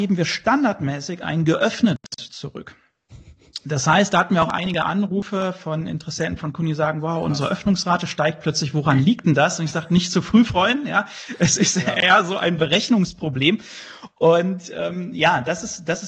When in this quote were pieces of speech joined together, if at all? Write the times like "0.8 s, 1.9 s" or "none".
none